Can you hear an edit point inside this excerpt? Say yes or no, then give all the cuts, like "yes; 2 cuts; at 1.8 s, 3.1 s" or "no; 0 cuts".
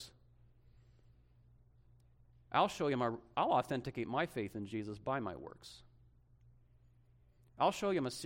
no; 0 cuts